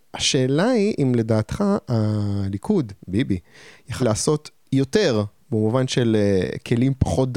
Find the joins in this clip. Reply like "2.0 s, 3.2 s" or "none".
4.0 s